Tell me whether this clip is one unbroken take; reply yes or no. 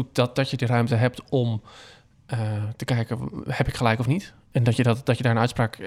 yes